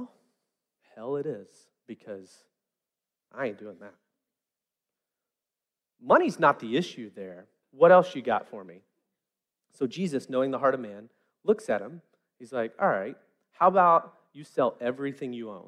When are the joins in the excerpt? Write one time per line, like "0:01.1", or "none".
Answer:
0:07.6